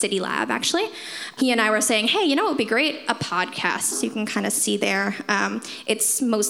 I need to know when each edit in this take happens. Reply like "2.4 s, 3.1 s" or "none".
3.9 s